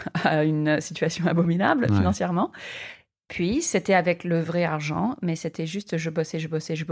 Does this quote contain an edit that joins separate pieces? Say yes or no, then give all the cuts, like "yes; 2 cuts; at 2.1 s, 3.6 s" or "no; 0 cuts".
no; 0 cuts